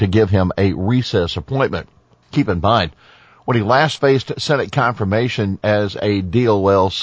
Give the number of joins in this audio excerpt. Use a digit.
1